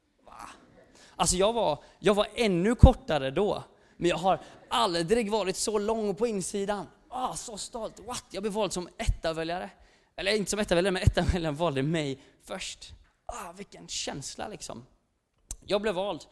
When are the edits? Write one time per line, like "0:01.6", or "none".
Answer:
none